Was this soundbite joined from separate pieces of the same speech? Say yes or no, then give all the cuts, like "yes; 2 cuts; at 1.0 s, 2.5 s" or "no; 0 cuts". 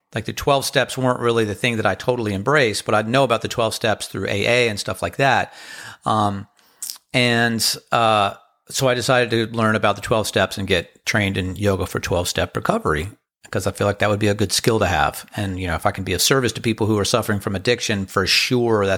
no; 0 cuts